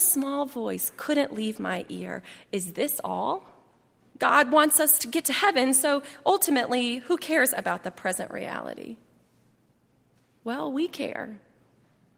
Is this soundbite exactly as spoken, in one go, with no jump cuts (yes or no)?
no